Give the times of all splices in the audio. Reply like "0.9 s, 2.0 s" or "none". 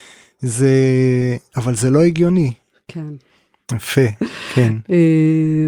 3.7 s